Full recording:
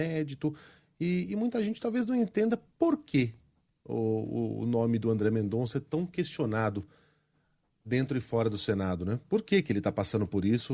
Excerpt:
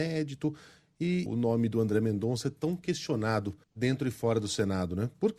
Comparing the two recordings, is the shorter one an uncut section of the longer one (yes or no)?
no